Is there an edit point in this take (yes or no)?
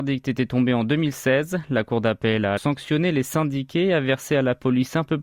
yes